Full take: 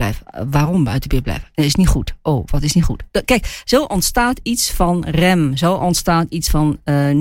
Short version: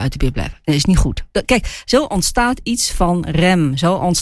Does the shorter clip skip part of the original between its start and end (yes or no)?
yes